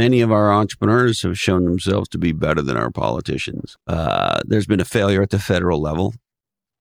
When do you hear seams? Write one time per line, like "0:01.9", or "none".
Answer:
0:03.8